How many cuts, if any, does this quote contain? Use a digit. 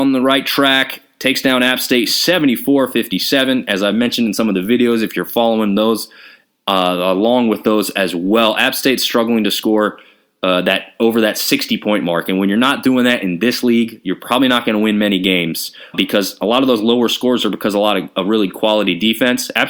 1